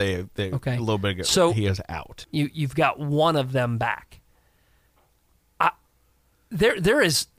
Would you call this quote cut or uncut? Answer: cut